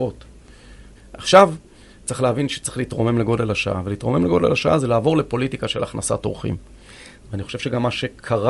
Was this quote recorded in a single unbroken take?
no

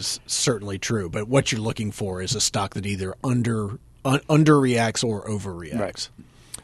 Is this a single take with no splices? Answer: yes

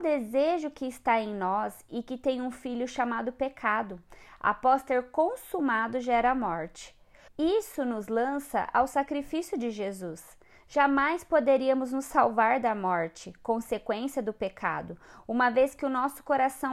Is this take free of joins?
no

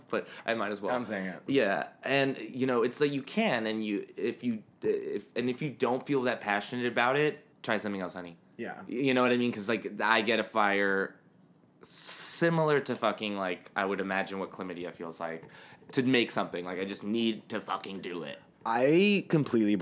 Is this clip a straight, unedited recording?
no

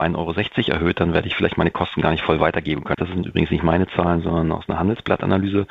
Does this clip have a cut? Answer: yes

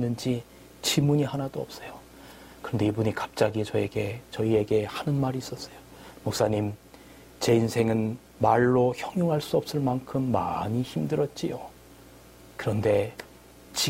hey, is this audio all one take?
yes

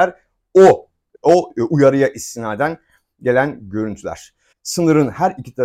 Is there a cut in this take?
yes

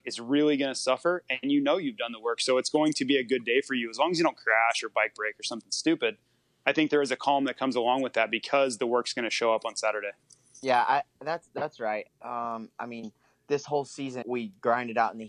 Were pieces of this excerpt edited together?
yes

